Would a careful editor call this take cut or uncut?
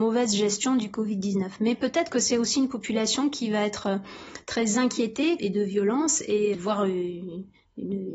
cut